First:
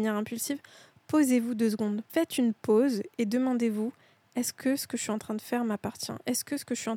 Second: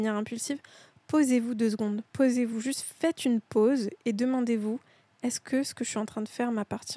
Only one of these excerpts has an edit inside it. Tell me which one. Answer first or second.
first